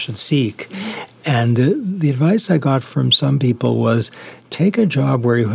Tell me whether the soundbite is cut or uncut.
uncut